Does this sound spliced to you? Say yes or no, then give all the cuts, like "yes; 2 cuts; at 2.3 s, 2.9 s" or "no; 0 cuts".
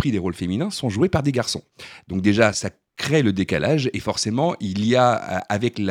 yes; 1 cut; at 2.5 s